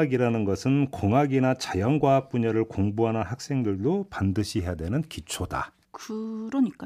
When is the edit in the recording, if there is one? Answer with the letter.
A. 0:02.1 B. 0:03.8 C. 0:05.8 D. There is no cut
C